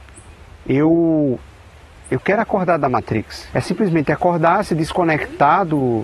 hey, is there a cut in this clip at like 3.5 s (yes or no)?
yes